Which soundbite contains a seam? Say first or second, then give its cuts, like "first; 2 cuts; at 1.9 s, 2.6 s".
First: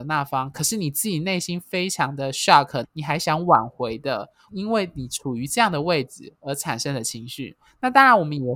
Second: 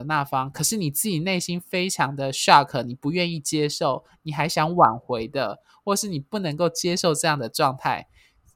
first; 2 cuts; at 2.8 s, 4.5 s